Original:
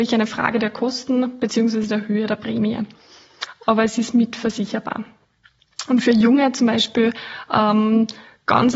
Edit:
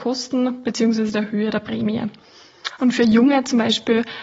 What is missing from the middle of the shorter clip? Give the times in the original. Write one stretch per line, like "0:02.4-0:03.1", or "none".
0:03.5-0:05.9